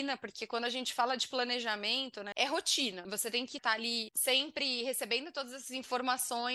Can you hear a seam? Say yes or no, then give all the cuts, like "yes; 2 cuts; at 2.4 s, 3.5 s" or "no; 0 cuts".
yes; 1 cut; at 2.3 s